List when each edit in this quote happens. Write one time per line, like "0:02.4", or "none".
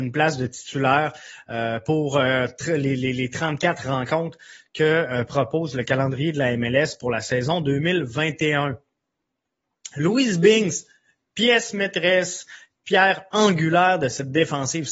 none